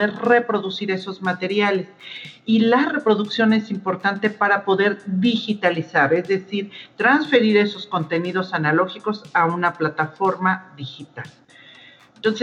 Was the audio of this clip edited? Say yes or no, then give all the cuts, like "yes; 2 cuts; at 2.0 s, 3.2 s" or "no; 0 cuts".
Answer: no; 0 cuts